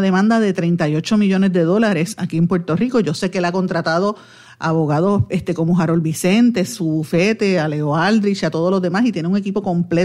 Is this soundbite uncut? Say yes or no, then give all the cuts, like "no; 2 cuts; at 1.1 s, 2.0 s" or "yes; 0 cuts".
yes; 0 cuts